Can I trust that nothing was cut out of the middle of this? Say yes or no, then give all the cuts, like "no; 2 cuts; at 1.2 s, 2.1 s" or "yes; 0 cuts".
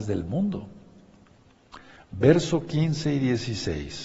yes; 0 cuts